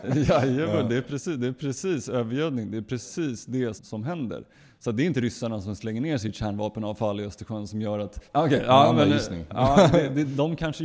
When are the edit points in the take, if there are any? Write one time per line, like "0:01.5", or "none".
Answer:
0:03.8
0:08.3